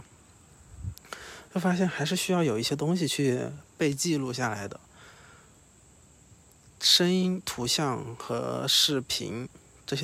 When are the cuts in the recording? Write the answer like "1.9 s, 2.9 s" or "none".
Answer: 1.5 s